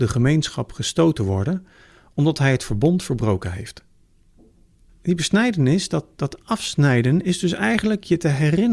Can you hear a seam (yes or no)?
yes